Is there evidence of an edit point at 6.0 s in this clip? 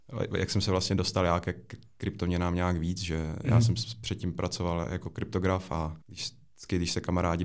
yes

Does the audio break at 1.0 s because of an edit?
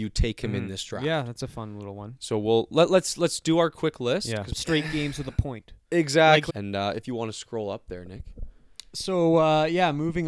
no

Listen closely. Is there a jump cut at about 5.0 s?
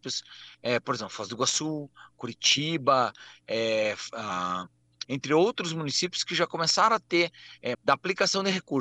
yes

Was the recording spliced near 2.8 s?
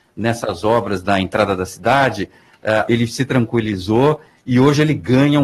yes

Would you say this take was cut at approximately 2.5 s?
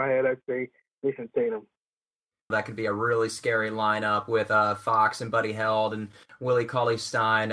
yes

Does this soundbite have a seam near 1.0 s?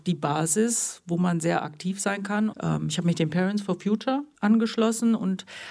no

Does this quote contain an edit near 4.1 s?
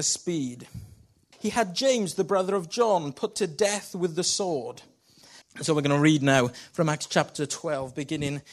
no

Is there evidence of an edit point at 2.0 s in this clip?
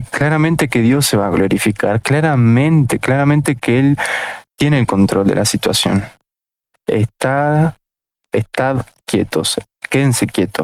no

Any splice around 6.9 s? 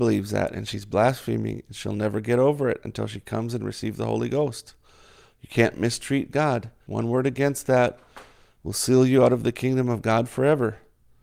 yes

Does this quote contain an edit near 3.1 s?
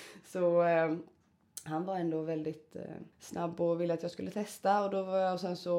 yes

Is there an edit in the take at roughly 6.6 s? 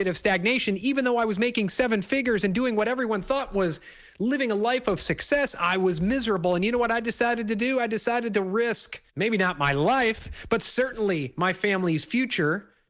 no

